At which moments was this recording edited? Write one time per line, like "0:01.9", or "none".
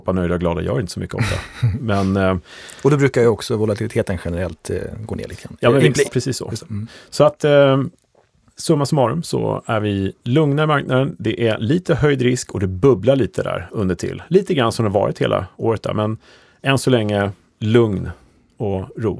0:06.0